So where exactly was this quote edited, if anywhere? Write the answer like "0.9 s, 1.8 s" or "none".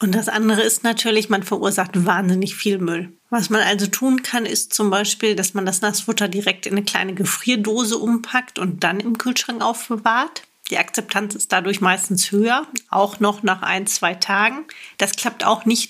none